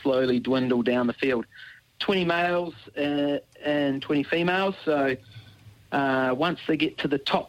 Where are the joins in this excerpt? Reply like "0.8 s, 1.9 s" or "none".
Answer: none

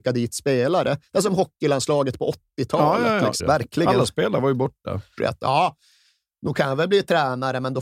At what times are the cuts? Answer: 3.4 s, 5.2 s

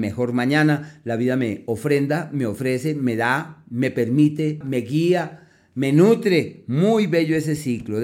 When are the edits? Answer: 4.6 s

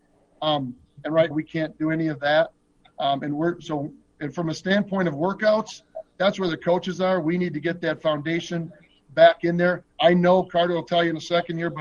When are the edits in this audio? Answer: 1.3 s

